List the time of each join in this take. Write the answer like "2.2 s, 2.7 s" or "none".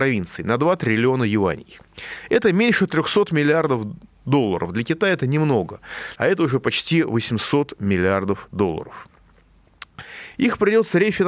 6.2 s, 10.3 s